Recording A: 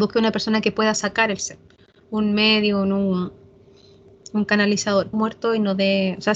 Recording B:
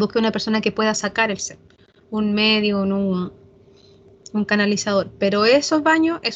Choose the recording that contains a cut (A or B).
A